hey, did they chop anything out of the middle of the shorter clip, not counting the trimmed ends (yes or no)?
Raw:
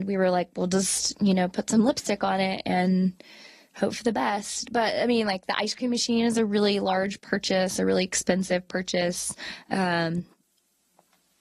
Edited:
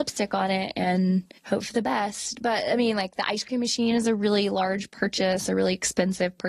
yes